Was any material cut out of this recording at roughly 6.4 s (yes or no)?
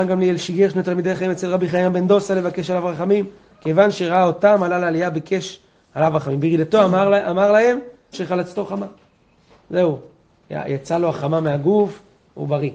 no